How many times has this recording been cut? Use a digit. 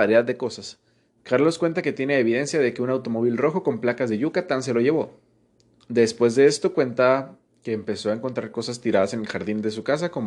2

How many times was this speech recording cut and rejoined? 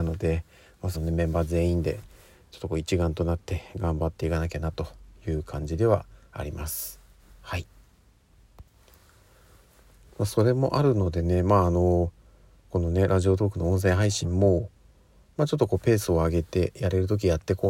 1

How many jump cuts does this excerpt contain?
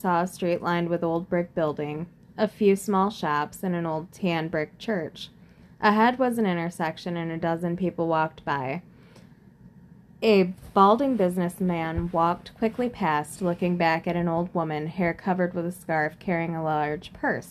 0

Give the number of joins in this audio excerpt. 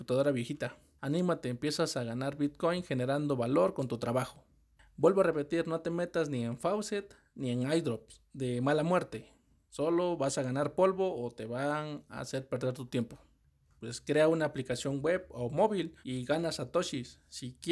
2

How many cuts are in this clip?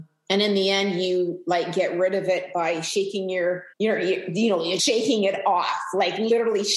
2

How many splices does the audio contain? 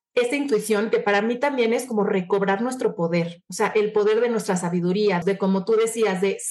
1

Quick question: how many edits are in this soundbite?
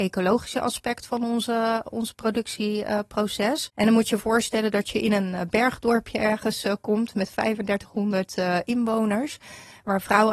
1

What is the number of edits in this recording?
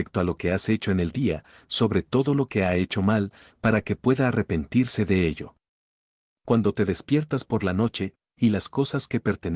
1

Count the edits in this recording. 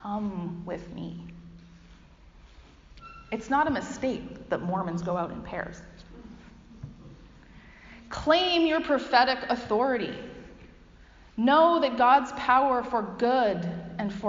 0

